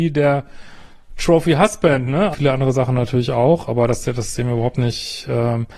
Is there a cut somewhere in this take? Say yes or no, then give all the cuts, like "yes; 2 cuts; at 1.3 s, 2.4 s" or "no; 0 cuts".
yes; 1 cut; at 2.3 s